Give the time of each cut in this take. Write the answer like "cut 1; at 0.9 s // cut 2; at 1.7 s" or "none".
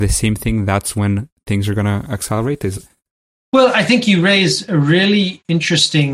none